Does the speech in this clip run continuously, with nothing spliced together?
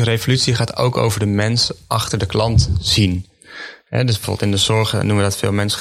yes; 0 cuts

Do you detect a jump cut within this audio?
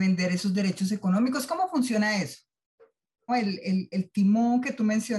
yes; 1 cut; at 3.3 s

